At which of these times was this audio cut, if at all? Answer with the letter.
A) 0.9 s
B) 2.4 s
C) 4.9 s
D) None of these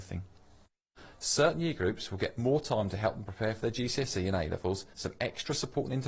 C